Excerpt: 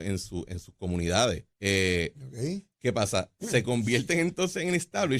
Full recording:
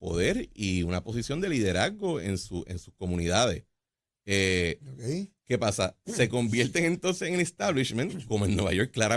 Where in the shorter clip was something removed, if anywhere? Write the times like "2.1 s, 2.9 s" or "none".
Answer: 1.5 s